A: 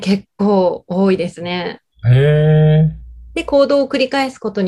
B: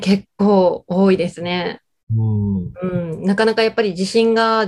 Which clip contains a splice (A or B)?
A